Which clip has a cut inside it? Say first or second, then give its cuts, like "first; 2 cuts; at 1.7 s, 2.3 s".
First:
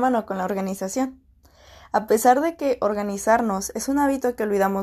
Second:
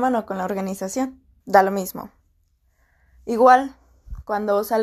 second; 1 cut; at 1.4 s